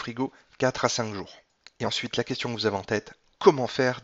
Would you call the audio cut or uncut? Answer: uncut